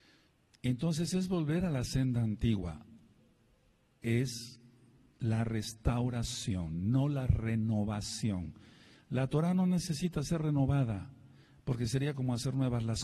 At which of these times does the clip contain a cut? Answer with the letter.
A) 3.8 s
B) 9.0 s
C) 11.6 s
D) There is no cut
D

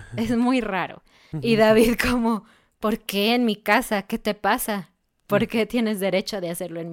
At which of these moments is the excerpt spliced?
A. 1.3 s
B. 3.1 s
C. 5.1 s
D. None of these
A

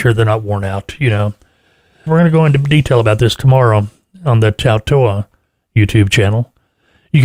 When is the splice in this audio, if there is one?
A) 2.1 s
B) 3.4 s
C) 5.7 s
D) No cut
A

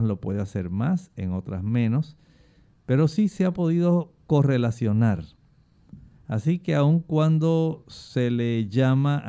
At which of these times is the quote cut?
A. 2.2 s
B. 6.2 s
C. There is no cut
C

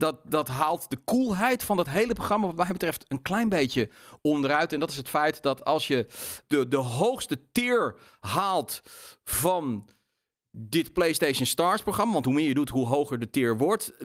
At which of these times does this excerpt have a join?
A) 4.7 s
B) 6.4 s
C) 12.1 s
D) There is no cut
B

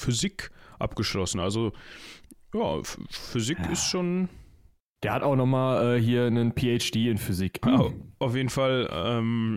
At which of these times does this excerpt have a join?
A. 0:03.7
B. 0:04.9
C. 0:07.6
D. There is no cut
C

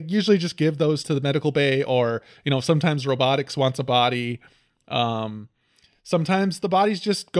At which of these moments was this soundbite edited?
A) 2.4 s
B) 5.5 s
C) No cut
C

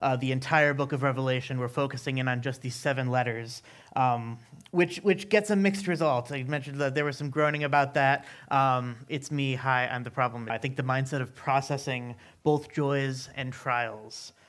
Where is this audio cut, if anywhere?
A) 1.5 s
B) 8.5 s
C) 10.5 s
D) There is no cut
C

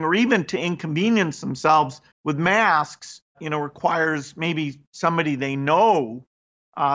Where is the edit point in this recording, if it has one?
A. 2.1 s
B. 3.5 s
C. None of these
A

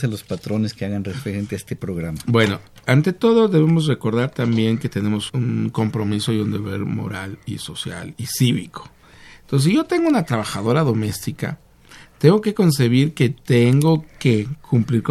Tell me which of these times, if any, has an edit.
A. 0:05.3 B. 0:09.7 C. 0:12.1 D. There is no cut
A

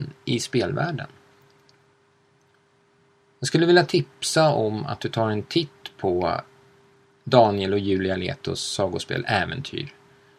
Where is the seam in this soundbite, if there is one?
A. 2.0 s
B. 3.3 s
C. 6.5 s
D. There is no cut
B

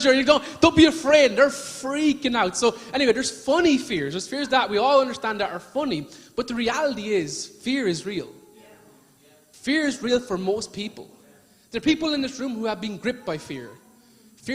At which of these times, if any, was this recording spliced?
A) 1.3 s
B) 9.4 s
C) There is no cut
C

